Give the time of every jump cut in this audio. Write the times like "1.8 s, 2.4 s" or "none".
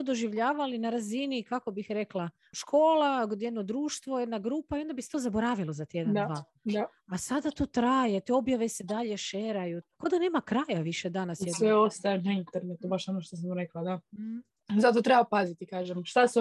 9.8 s